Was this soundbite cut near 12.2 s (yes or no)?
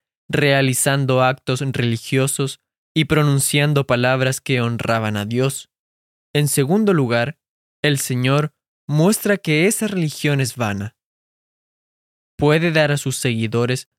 no